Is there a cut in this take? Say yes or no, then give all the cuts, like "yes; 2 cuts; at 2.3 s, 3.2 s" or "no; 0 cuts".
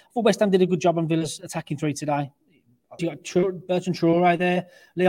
yes; 1 cut; at 3.0 s